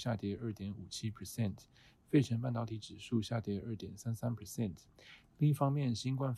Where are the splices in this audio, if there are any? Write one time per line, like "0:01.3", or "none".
none